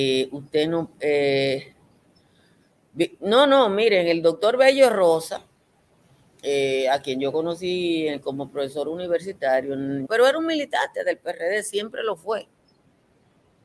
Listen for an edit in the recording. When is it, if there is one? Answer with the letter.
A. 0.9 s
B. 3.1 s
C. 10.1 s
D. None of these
C